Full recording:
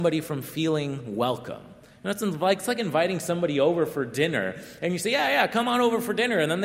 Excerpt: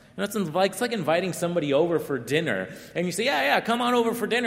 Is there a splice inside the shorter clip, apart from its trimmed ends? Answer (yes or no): no